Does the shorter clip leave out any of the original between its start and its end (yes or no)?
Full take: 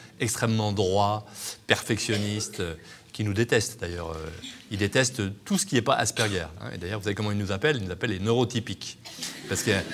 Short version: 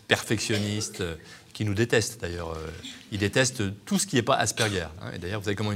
no